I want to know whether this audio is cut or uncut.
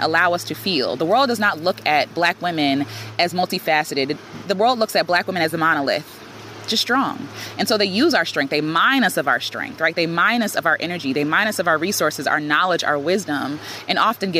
uncut